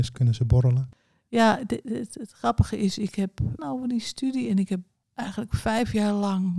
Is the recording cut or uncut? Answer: cut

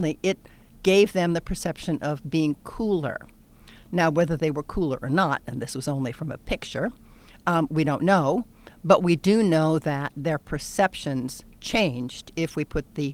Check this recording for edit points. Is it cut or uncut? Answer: uncut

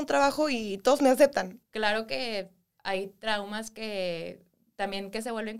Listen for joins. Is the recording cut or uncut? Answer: cut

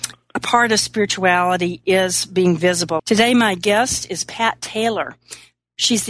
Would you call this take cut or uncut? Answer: cut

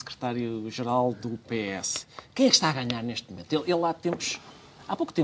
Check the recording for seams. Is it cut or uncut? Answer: uncut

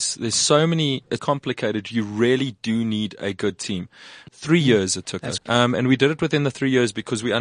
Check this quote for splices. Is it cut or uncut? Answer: cut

